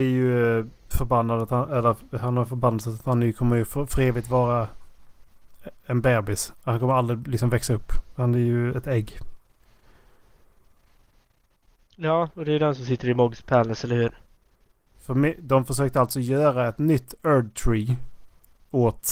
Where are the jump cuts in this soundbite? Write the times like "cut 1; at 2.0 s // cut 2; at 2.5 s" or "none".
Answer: cut 1; at 14.9 s